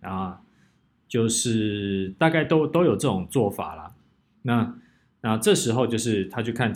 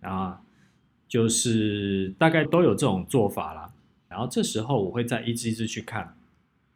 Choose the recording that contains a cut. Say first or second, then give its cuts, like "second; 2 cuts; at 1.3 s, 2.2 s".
second; 2 cuts; at 2.5 s, 4.1 s